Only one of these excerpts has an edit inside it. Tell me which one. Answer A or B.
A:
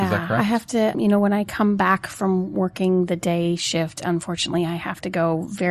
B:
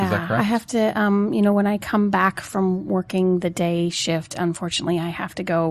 A